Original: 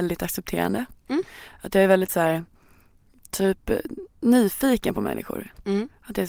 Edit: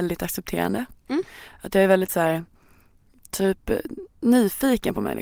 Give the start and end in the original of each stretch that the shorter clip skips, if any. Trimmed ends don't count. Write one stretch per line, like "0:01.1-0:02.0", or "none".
none

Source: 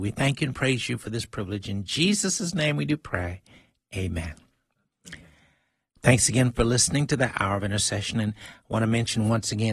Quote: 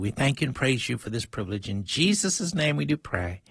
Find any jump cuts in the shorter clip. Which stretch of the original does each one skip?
none

